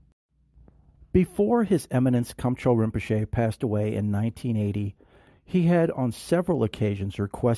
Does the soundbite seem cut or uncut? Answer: uncut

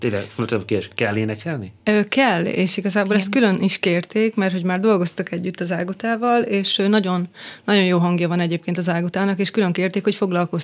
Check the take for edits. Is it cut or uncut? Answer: uncut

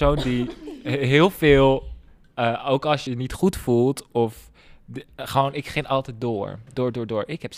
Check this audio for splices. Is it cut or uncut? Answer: cut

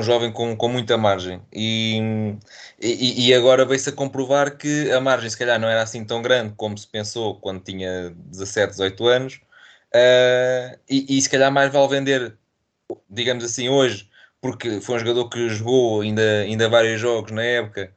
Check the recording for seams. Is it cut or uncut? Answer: uncut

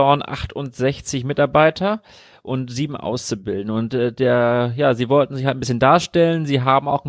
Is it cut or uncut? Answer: uncut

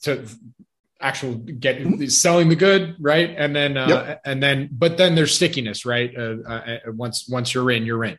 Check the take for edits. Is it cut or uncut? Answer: uncut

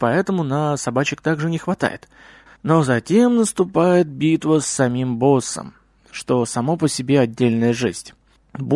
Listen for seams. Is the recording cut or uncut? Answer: cut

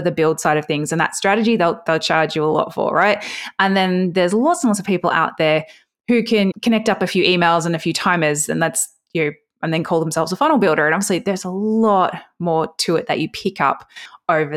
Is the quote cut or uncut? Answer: uncut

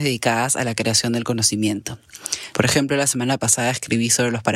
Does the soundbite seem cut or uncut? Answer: cut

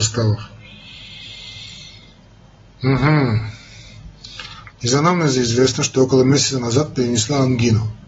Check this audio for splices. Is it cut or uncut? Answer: cut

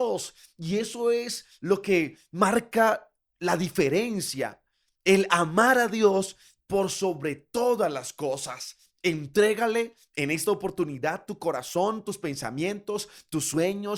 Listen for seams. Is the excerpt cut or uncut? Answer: uncut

